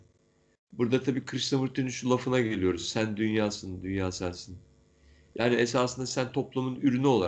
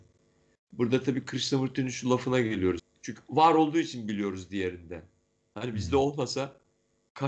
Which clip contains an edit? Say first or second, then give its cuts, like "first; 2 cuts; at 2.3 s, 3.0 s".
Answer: second; 1 cut; at 2.8 s